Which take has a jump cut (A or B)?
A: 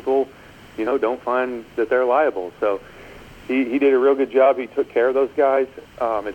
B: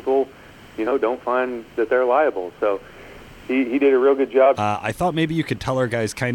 B